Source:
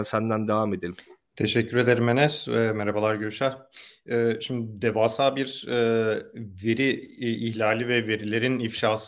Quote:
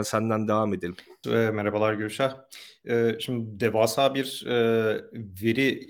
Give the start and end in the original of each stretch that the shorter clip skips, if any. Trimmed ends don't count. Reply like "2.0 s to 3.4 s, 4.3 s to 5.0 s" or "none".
1.2 s to 2.5 s